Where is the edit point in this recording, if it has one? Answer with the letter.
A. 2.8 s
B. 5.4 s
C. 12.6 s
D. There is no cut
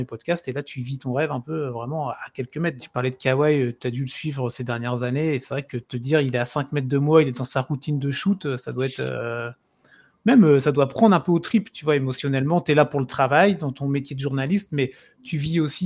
A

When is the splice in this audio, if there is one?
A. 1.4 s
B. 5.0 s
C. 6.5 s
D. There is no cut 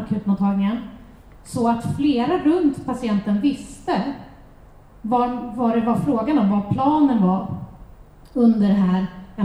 C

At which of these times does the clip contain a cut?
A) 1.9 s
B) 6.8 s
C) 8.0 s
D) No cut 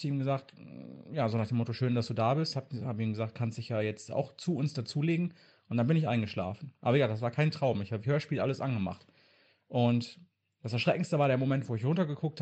C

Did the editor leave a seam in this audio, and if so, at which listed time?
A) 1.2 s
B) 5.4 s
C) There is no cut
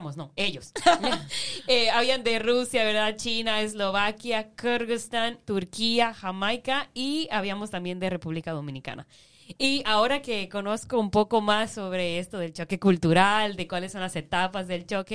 B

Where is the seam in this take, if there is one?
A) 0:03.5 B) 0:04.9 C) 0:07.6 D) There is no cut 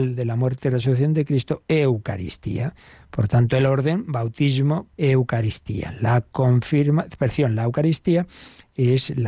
B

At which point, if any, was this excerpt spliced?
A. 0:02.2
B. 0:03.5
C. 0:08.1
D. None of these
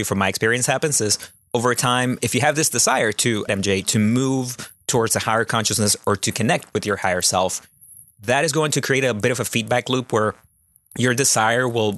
B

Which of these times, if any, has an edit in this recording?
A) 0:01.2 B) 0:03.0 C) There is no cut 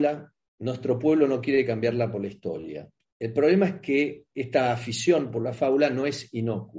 C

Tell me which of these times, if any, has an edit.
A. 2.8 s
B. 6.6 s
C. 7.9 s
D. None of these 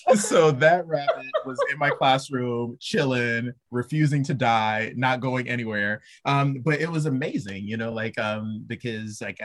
D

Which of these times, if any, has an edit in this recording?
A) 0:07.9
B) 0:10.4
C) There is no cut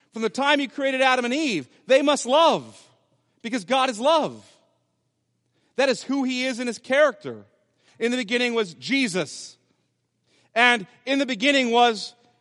A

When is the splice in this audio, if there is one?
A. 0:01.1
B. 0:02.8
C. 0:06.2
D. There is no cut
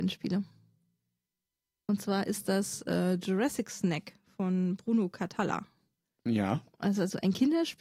C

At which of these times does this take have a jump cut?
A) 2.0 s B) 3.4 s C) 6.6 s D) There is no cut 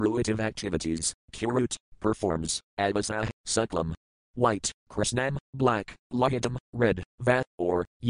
B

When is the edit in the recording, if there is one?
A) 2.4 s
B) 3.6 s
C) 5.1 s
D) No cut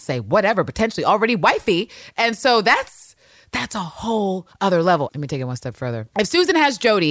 C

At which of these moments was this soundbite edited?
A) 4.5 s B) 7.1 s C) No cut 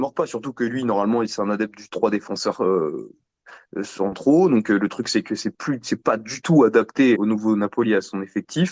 B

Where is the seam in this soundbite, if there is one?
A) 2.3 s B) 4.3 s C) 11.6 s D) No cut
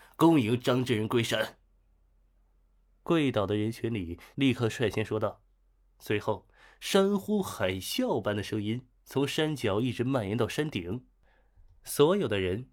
B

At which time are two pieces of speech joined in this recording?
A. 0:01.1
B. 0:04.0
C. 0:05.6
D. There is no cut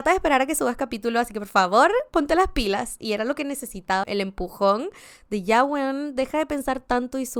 B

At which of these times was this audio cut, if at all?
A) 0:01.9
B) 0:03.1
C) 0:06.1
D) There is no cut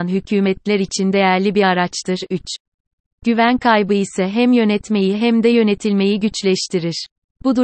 D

